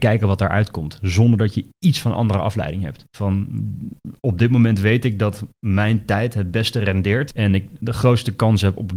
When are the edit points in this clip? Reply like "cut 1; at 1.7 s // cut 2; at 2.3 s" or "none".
cut 1; at 3.1 s